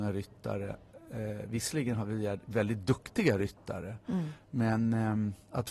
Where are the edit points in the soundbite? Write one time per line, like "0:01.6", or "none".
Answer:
none